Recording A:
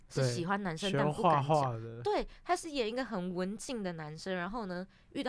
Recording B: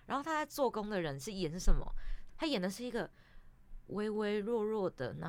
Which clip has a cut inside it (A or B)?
B